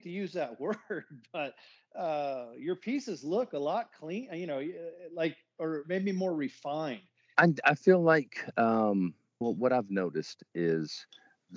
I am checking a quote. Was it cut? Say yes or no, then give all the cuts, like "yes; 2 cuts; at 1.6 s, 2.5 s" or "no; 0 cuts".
yes; 2 cuts; at 7.3 s, 9.4 s